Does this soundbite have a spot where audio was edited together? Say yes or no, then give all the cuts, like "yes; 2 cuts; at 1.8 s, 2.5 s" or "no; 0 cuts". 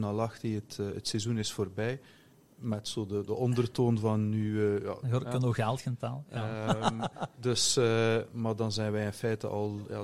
yes; 1 cut; at 5.0 s